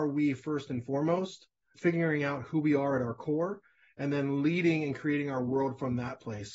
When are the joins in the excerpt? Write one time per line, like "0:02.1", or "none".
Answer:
none